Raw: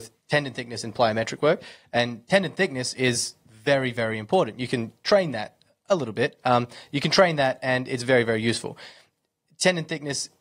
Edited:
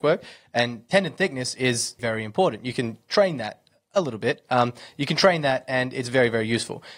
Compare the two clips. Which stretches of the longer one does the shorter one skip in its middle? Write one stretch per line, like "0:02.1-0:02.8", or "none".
0:03.4-0:03.9

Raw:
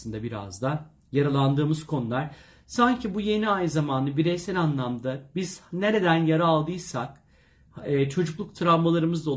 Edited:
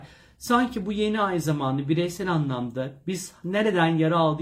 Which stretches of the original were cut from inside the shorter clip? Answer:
none

